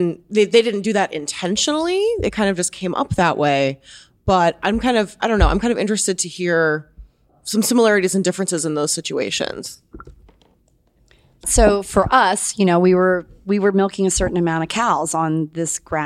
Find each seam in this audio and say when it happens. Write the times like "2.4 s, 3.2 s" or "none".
none